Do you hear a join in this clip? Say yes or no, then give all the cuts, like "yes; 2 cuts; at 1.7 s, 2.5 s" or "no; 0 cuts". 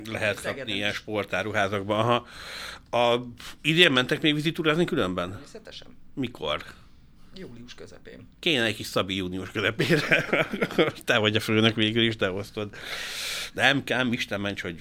no; 0 cuts